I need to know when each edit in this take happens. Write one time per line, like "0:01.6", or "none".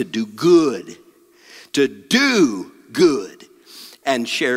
none